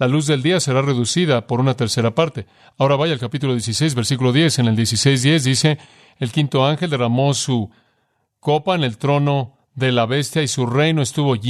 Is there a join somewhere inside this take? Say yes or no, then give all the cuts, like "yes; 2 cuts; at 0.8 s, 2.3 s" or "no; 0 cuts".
no; 0 cuts